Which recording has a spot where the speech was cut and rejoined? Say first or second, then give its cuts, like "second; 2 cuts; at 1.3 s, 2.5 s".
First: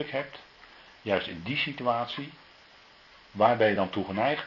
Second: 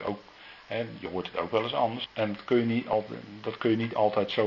second; 1 cut; at 2.1 s